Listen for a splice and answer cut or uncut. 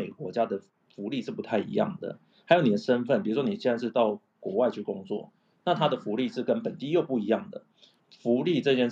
cut